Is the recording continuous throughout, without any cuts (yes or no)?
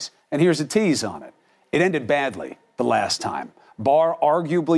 yes